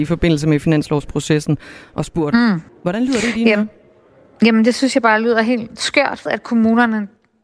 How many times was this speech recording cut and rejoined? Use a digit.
2